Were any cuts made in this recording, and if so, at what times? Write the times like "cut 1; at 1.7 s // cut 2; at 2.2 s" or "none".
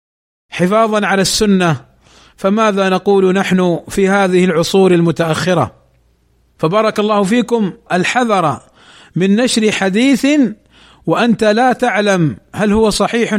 cut 1; at 7.9 s